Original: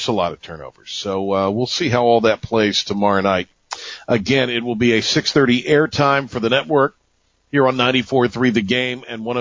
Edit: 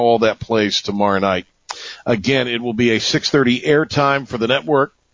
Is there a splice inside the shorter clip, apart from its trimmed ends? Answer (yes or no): no